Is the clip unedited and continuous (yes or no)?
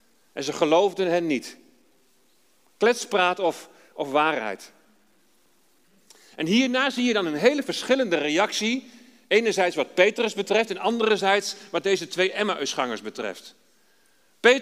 yes